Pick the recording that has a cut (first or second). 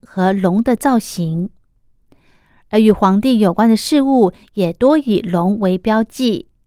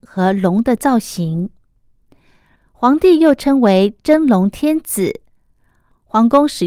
second